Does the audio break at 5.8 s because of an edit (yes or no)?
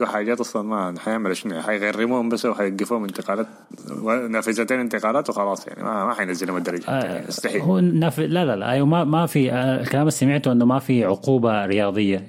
no